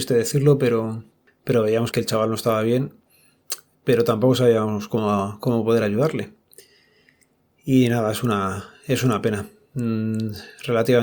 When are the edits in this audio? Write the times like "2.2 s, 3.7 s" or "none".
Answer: 1.9 s